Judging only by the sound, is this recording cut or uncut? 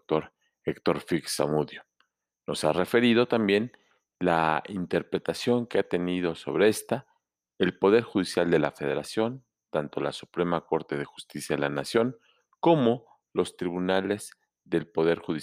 uncut